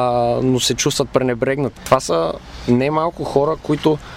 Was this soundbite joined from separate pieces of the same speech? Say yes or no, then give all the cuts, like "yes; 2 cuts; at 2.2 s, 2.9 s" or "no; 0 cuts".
yes; 1 cut; at 1.8 s